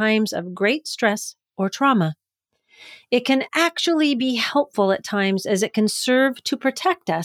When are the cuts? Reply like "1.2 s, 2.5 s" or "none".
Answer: none